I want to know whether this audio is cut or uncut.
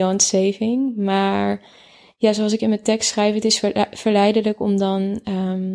uncut